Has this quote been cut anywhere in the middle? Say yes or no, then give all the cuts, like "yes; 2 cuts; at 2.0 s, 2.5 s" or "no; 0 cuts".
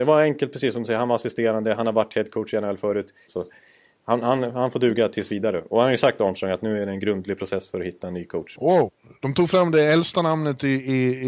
yes; 2 cuts; at 3.3 s, 8.6 s